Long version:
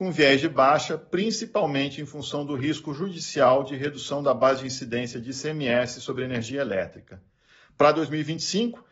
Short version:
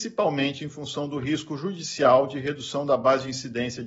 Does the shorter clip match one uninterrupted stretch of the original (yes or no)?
yes